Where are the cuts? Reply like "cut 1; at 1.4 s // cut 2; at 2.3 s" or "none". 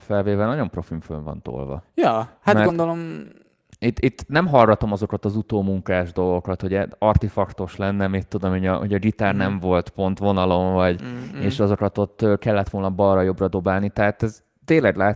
none

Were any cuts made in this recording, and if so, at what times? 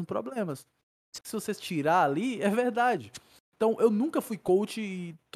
cut 1; at 1.2 s

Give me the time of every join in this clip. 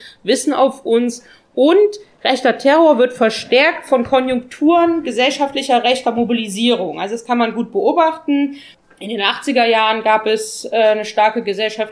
none

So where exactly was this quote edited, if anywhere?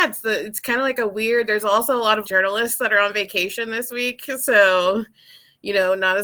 cut 1; at 2.2 s

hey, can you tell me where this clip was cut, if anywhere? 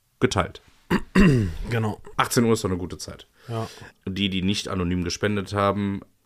cut 1; at 2.1 s // cut 2; at 3.9 s

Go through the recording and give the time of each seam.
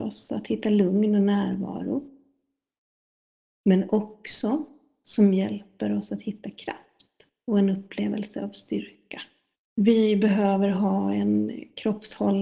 cut 1; at 9.6 s

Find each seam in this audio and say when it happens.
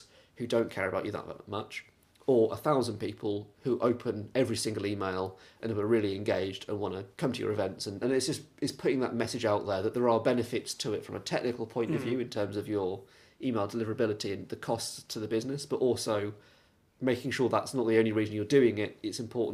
cut 1; at 8.0 s

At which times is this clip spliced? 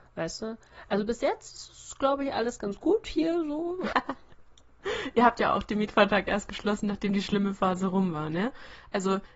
cut 1; at 3.9 s

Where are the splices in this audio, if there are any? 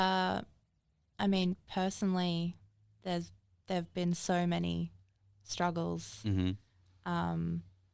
none

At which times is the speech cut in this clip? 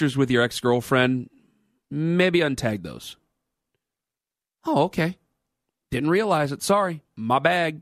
none

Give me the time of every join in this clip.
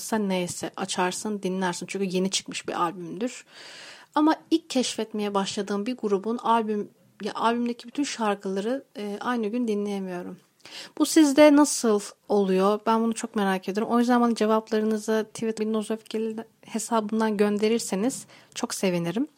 cut 1; at 15.6 s

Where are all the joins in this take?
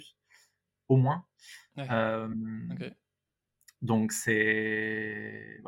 none

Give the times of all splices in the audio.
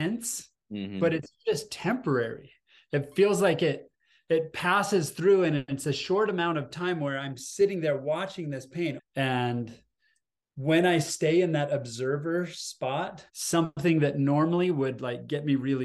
cut 1; at 9.0 s // cut 2; at 13.3 s

